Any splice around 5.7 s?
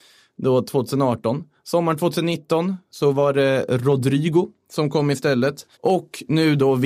yes; 1 cut; at 5.7 s

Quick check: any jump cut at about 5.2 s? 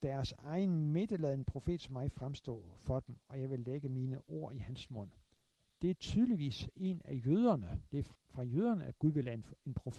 no; 1 cut; at 8.1 s

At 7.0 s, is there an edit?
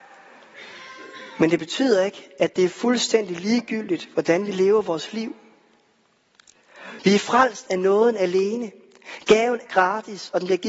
yes; 2 cuts; at 7.0 s, 9.7 s

